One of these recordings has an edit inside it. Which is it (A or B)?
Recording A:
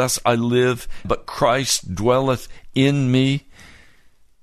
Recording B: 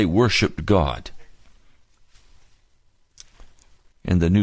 A